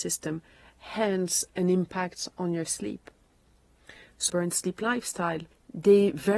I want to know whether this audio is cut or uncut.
cut